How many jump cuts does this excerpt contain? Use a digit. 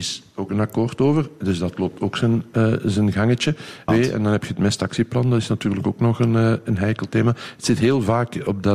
1